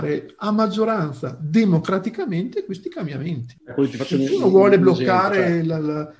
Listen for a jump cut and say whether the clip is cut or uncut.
uncut